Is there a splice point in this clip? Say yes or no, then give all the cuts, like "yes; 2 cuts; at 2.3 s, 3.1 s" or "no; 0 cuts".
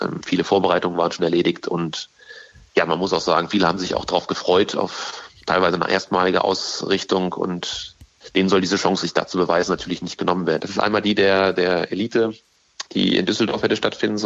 yes; 2 cuts; at 9.0 s, 10.6 s